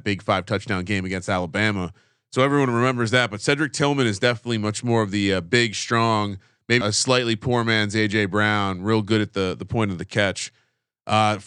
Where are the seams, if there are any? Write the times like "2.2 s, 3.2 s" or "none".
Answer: 6.8 s